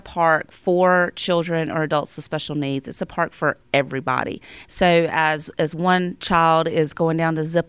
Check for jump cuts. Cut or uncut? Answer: cut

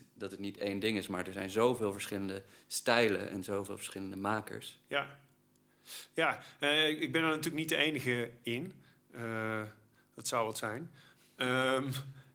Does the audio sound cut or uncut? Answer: uncut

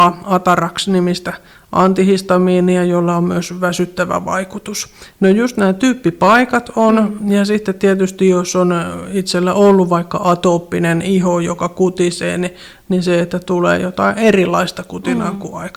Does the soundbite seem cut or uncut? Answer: cut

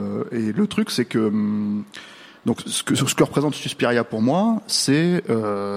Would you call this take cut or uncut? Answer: uncut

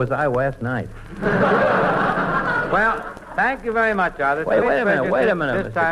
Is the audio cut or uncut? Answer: cut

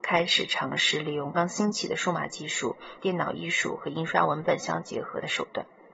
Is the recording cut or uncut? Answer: cut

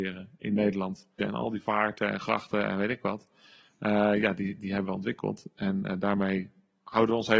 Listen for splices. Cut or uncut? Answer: cut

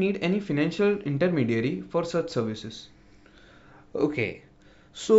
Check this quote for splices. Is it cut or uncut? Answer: uncut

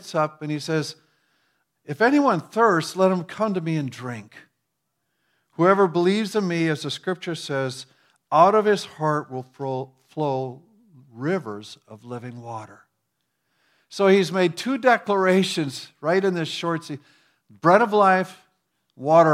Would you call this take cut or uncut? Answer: uncut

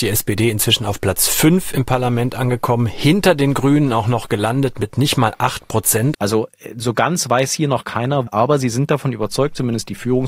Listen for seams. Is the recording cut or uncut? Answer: cut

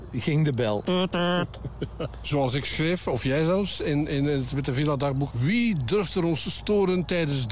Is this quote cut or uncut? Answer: uncut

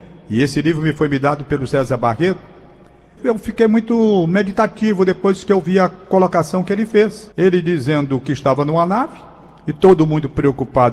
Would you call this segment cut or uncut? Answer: cut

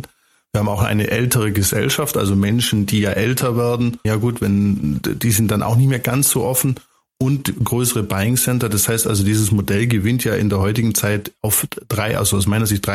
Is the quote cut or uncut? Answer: cut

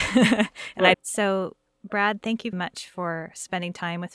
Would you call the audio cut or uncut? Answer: cut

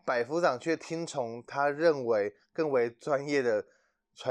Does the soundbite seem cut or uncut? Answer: uncut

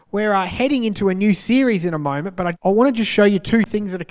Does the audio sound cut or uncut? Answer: cut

